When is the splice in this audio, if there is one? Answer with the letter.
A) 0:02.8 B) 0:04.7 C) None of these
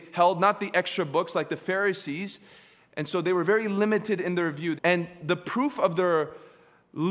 B